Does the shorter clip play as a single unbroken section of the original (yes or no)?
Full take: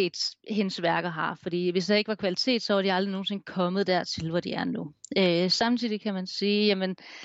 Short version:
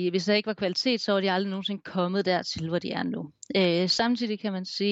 yes